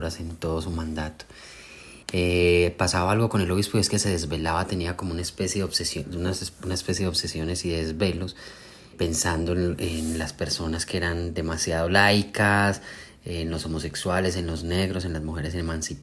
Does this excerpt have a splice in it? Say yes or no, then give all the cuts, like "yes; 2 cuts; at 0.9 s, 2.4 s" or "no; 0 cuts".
yes; 2 cuts; at 2.0 s, 8.9 s